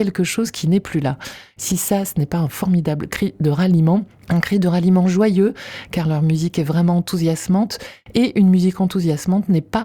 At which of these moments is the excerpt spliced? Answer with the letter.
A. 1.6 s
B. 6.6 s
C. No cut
A